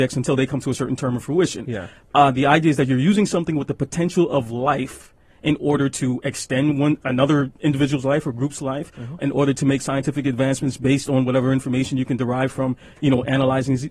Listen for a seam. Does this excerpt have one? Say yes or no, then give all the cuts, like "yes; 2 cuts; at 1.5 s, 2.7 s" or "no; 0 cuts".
no; 0 cuts